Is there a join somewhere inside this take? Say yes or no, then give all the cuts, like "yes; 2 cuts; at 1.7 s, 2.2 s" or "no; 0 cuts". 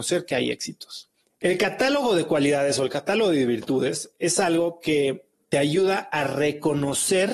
yes; 1 cut; at 1.3 s